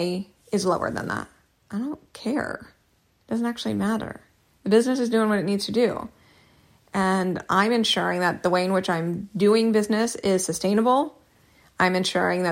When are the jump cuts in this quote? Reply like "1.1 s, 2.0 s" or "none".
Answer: none